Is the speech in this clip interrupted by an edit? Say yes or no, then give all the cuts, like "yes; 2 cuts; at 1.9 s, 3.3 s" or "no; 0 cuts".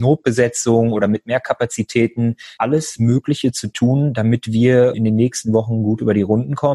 yes; 1 cut; at 2.6 s